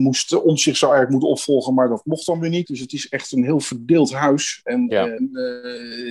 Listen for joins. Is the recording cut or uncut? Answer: cut